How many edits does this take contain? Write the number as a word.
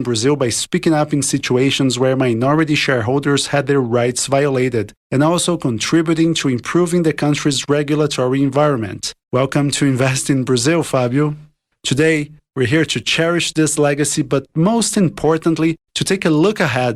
two